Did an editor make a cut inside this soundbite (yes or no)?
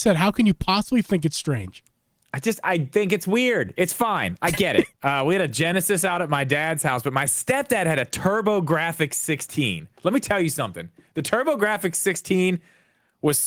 yes